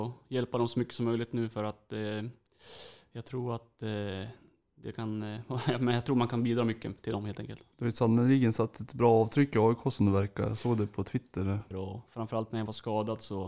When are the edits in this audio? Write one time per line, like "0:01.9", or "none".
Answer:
0:07.7
0:11.7